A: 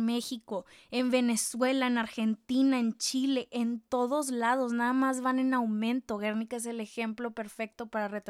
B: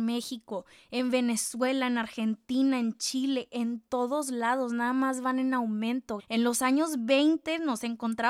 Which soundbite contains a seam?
B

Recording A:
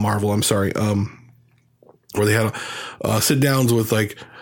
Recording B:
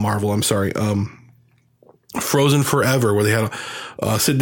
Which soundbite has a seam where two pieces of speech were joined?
A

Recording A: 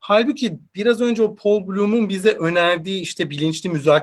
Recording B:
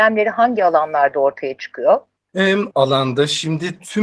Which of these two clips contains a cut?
B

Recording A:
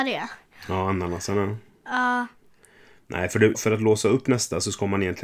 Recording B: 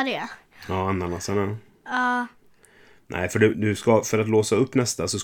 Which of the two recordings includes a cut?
A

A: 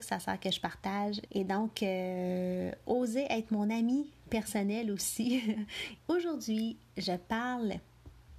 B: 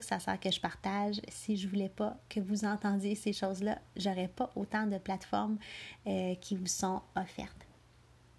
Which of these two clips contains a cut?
A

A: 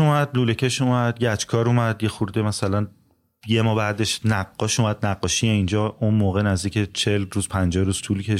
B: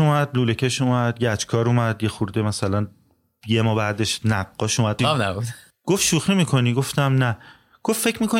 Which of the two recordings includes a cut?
B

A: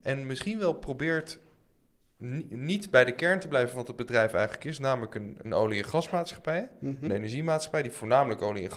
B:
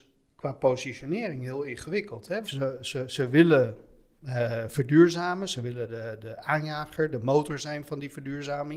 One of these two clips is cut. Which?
B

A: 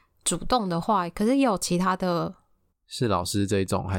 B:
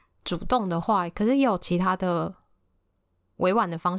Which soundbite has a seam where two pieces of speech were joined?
A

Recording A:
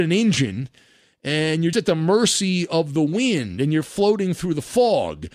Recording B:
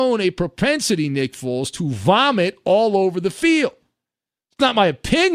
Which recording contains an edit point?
A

